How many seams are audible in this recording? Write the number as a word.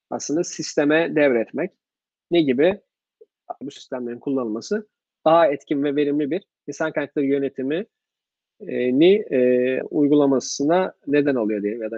two